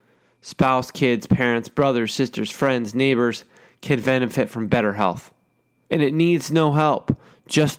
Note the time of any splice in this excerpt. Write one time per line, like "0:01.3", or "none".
0:05.8

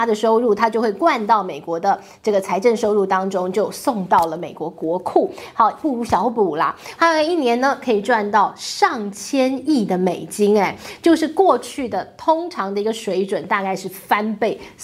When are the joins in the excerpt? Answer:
0:07.0

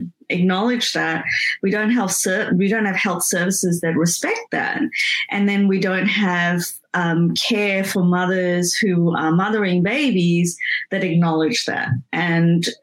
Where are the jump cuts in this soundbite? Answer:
none

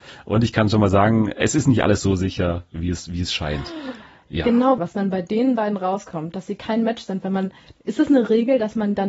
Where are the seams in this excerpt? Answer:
0:04.8

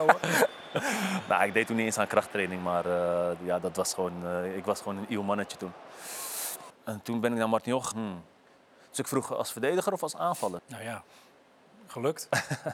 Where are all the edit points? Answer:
0:06.7
0:07.9
0:10.6

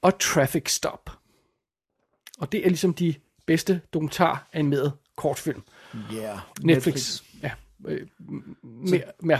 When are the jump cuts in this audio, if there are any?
0:06.5

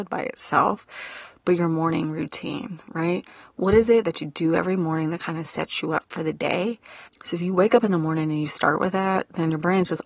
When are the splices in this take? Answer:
0:07.1

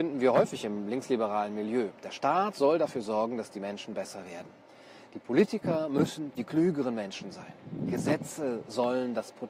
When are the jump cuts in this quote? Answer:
none

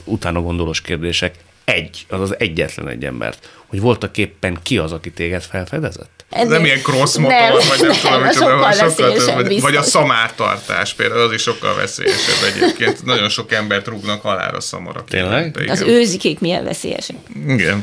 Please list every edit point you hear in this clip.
0:06.3

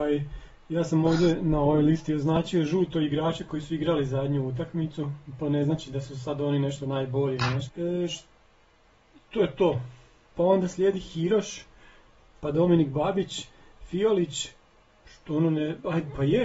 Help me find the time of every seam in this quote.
0:07.7
0:10.3

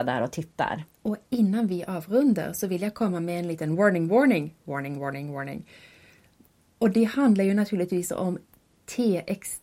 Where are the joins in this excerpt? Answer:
none

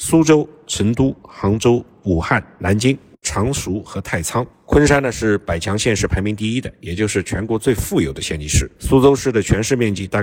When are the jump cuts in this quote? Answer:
0:03.2

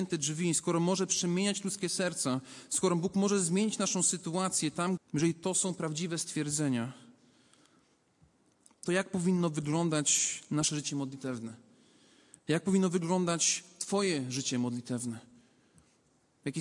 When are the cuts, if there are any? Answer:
0:05.0

